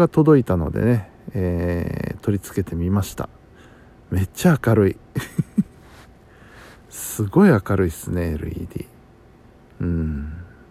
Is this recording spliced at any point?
no; 0 cuts

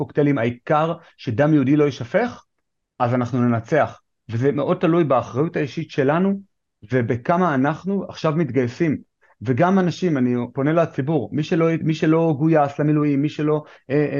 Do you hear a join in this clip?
no; 0 cuts

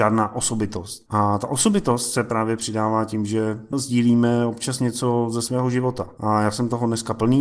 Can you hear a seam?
no; 0 cuts

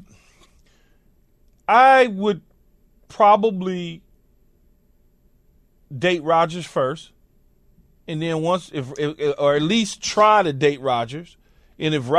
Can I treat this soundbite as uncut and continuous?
yes; 0 cuts

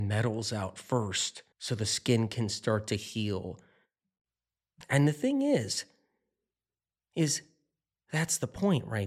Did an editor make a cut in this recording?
yes; 1 cut; at 1.5 s

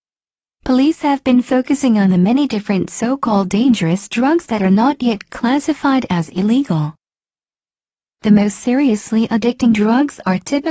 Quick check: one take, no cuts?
yes; 0 cuts

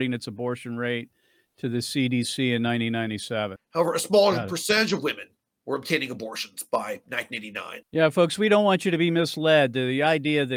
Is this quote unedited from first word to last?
no; 2 cuts; at 3.6 s, 7.8 s

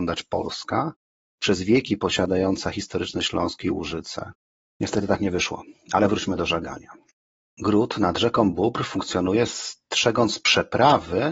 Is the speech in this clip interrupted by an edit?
no; 0 cuts

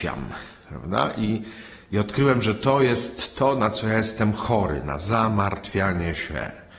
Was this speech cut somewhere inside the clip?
no; 0 cuts

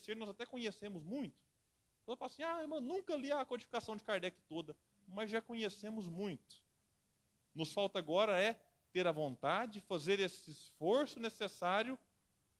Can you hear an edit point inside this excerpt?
no; 0 cuts

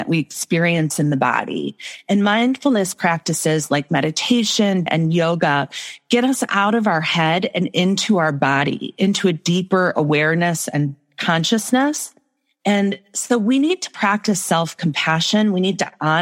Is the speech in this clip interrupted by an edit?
yes; 1 cut; at 4.9 s

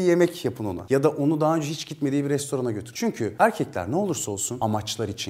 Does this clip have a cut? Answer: yes; 1 cut; at 2.9 s

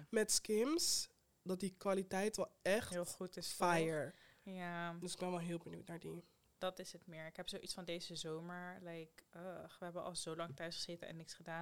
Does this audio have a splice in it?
yes; 1 cut; at 6.5 s

